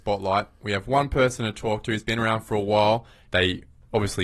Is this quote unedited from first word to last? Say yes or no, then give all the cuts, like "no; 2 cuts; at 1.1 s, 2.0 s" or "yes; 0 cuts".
no; 1 cut; at 3.3 s